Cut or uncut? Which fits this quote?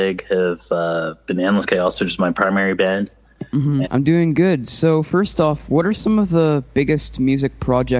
cut